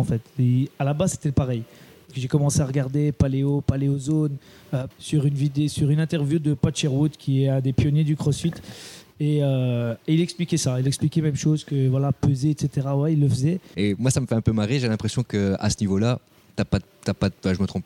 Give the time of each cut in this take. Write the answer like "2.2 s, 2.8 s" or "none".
4.9 s, 13.7 s

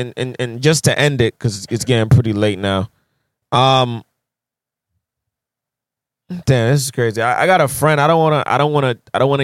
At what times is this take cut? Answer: none

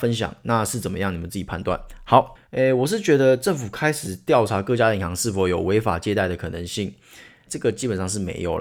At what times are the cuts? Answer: 2.4 s, 7.5 s

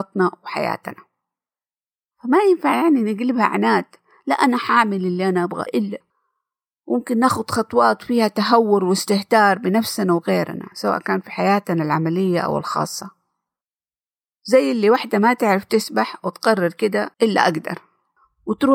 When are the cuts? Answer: 5.7 s, 17.1 s

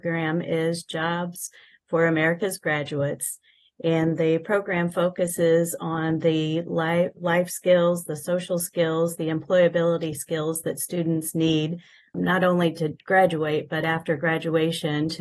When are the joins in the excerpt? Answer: 12.1 s

